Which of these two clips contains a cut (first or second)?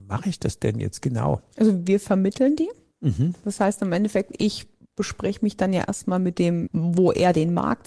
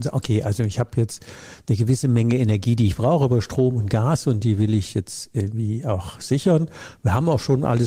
first